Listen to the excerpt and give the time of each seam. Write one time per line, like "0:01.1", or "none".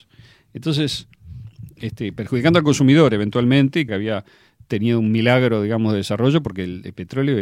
0:03.9

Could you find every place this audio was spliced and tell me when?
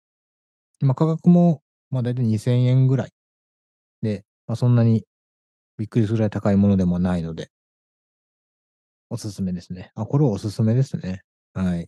none

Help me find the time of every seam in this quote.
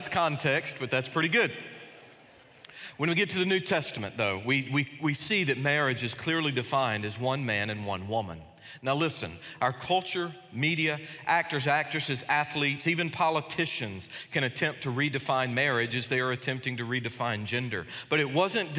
none

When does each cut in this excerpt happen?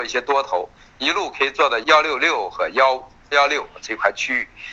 0:01.8
0:03.3

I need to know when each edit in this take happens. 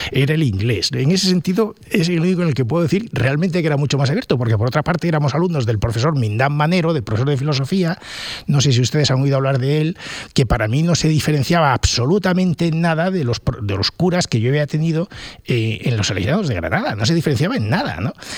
none

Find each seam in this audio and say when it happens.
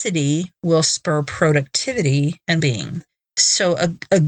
0:02.6

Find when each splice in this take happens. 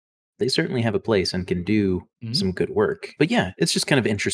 0:02.1
0:03.2

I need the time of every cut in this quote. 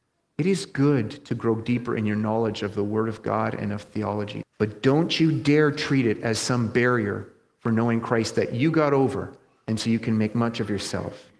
0:04.4

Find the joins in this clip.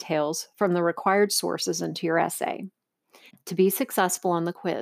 0:03.3

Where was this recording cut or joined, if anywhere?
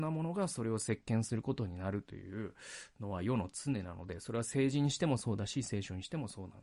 none

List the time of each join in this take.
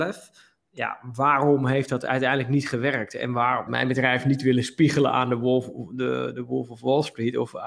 0:03.7

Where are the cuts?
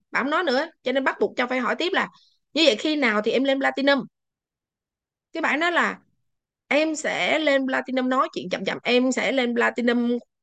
0:08.8

